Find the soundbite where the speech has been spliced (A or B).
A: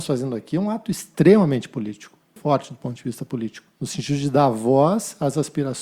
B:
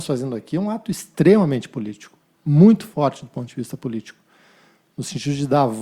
A